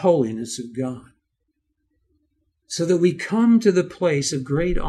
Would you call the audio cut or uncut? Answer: uncut